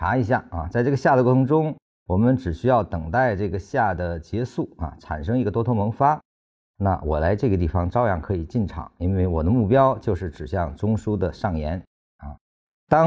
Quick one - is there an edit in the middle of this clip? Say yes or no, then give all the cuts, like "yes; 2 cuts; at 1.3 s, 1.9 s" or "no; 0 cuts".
no; 0 cuts